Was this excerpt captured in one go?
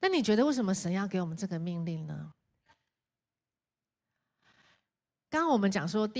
yes; 0 cuts

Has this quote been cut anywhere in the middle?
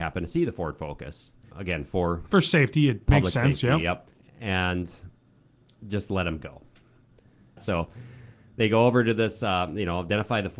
yes; 3 cuts; at 1.5 s, 4.1 s, 7.6 s

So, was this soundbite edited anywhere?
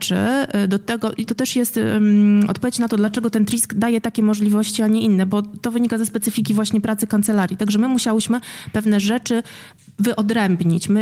yes; 1 cut; at 1.3 s

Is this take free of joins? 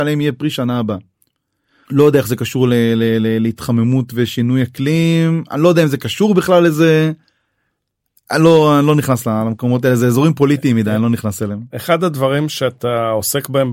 no; 2 cuts; at 1.8 s, 11.7 s

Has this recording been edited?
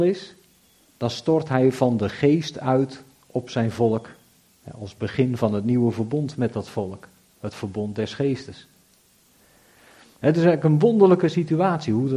no; 0 cuts

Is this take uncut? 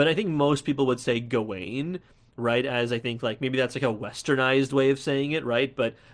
yes; 0 cuts

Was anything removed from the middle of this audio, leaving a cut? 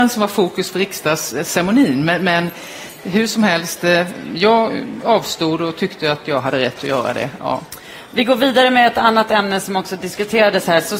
no; 0 cuts

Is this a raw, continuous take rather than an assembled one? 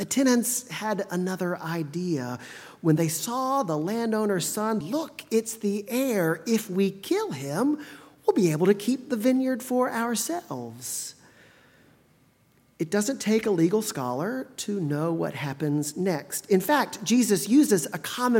no; 1 cut; at 4.8 s

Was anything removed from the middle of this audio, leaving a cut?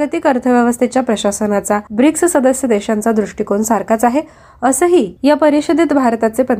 yes; 2 cuts; at 1.9 s, 5.2 s

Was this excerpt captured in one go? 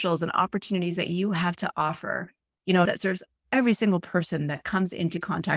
no; 1 cut; at 2.9 s

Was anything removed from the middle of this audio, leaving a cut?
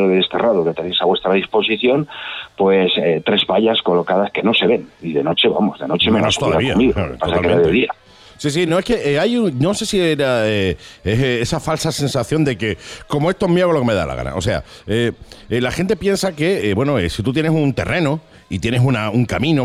no; 0 cuts

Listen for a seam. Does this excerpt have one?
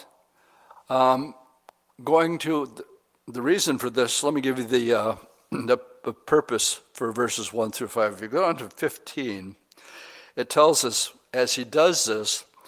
no; 0 cuts

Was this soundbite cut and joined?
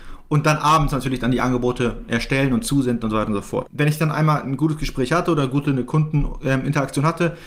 yes; 1 cut; at 3.7 s

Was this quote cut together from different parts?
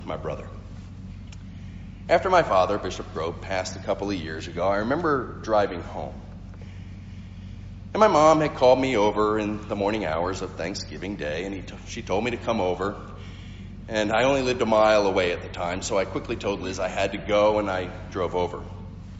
no; 0 cuts

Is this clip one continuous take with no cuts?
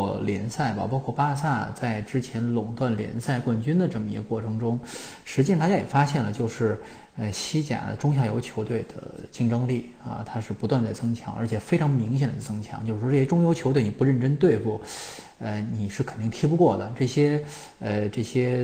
yes; 0 cuts

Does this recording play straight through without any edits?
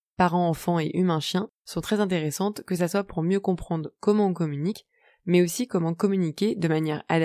yes; 0 cuts

